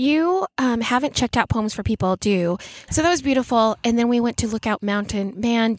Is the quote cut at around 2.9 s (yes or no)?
yes